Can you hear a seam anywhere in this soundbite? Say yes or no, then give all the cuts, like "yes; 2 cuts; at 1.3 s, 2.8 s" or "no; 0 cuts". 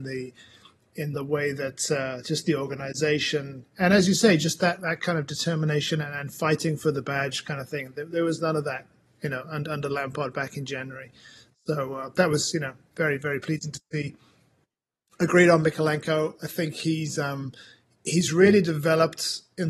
no; 0 cuts